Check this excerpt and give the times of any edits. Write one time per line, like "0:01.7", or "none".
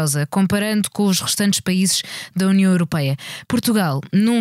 0:03.4